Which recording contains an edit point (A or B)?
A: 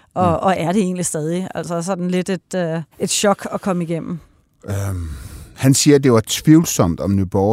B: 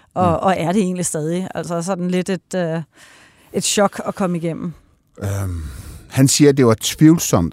A